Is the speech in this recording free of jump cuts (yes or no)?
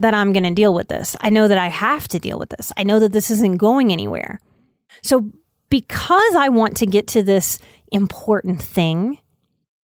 no